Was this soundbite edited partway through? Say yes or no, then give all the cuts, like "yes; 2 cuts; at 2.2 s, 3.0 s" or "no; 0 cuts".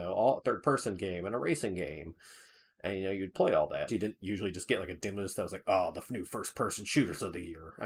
yes; 1 cut; at 3.9 s